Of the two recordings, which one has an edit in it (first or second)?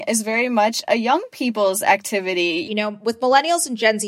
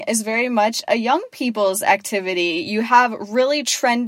first